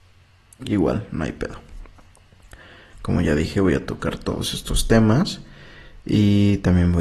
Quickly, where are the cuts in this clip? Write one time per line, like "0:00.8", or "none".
0:02.9

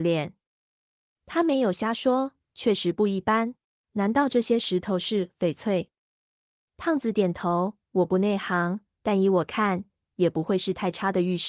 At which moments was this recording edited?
0:03.8
0:10.0

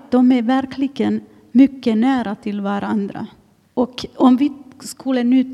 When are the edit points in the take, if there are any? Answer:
0:03.7

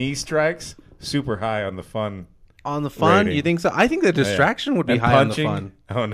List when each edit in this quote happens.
none

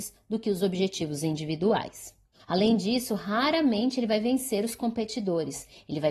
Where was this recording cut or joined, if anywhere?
0:02.4

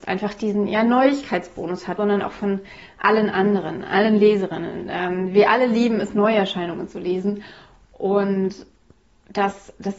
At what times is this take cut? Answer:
0:02.0

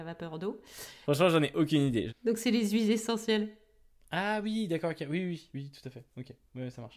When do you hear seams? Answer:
0:01.0
0:02.1

